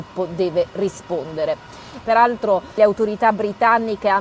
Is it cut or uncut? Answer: cut